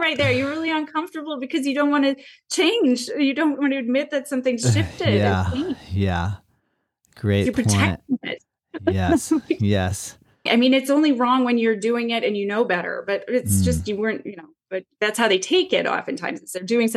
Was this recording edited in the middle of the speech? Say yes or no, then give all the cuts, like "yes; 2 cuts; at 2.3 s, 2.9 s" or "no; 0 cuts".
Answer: yes; 1 cut; at 10.5 s